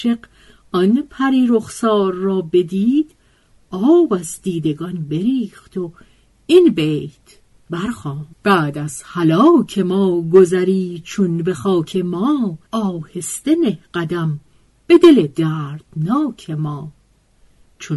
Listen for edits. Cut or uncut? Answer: cut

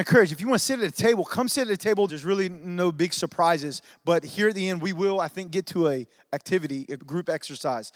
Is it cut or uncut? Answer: cut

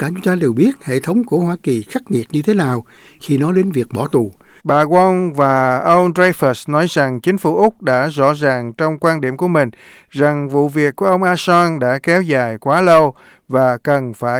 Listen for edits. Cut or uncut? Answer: cut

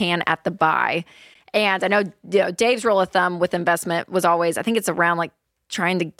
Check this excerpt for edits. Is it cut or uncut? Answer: uncut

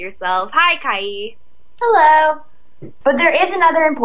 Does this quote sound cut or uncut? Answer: cut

